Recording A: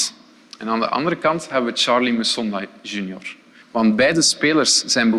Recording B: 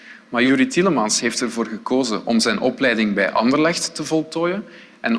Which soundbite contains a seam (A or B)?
A